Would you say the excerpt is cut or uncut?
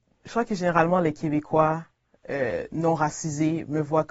uncut